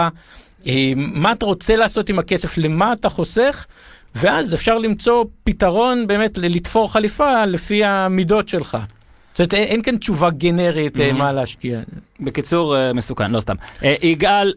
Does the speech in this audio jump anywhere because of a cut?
no; 0 cuts

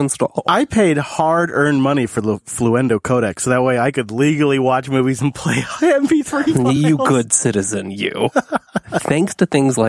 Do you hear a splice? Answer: no; 0 cuts

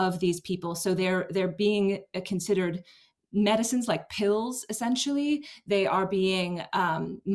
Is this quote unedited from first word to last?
yes; 0 cuts

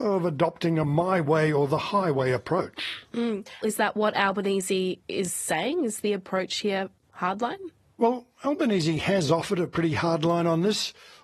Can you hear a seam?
yes; 1 cut; at 3.6 s

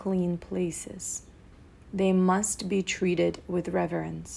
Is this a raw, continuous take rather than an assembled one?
yes; 0 cuts

